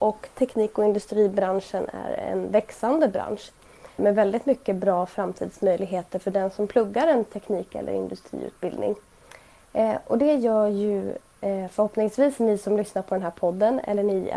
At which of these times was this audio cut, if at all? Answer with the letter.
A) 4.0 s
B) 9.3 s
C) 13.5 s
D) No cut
A